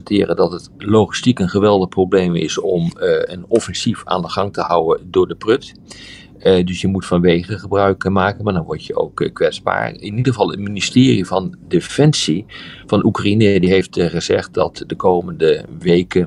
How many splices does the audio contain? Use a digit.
0